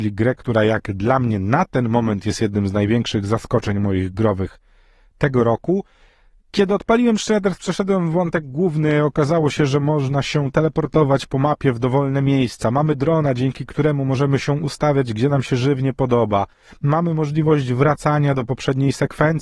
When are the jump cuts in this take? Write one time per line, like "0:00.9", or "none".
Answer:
none